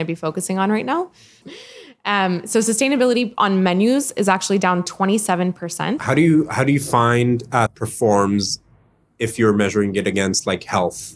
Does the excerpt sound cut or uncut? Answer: cut